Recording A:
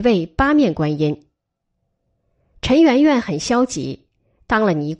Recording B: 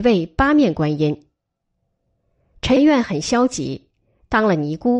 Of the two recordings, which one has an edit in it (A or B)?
B